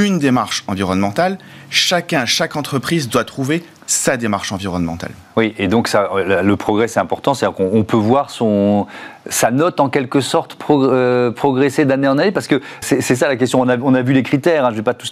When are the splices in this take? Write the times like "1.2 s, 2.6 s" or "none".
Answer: 12.8 s

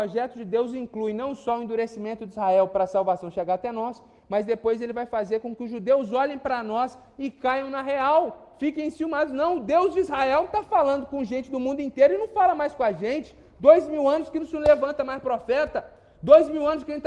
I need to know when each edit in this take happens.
none

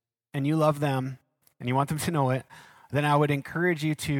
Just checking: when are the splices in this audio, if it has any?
none

